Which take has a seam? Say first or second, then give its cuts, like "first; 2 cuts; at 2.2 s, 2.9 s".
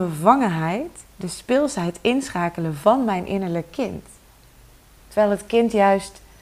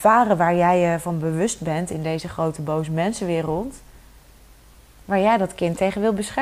first; 1 cut; at 5.0 s